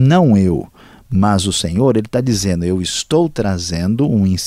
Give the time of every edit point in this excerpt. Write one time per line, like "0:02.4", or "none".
none